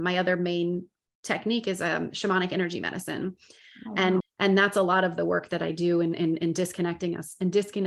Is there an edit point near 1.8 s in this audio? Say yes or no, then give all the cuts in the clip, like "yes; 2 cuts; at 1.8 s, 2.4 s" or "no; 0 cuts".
no; 1 cut; at 4.2 s